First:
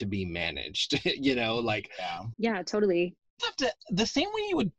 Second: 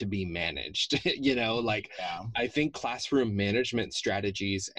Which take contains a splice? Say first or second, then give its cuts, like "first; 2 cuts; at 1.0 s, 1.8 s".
first; 2 cuts; at 2.3 s, 3.4 s